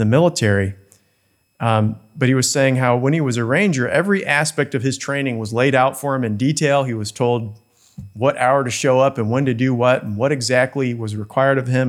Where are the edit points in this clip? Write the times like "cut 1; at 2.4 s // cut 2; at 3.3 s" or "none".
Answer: none